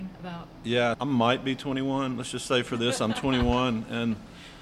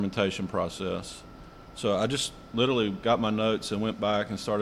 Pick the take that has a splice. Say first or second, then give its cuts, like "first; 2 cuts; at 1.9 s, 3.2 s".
first; 1 cut; at 0.9 s